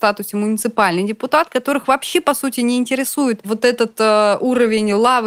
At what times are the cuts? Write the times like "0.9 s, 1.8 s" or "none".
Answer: none

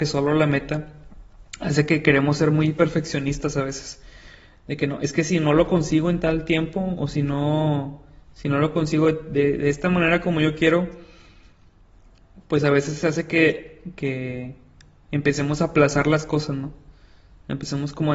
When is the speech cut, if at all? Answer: none

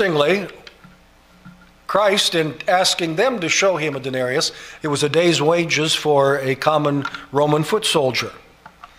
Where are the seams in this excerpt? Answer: 4.8 s

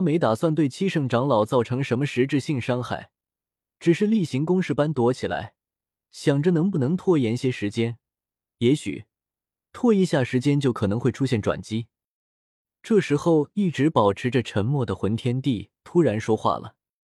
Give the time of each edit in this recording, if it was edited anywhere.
none

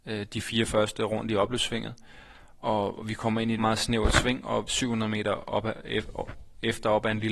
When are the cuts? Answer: 3.6 s, 4.7 s

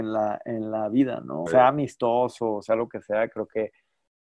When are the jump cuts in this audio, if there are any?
1.5 s

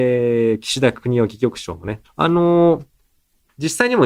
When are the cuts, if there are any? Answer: 2.0 s

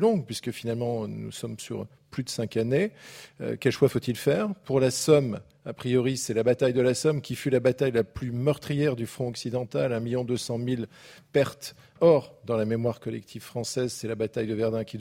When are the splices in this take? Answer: 12.0 s

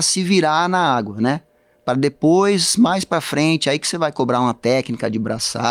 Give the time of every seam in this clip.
none

